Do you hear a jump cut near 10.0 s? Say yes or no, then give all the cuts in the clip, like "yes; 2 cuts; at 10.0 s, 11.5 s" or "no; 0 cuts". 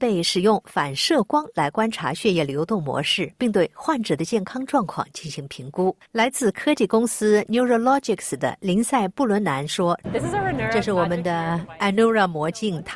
yes; 2 cuts; at 6.0 s, 10.0 s